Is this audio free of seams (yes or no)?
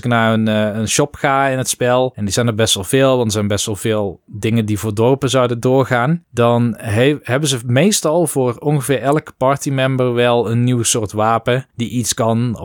yes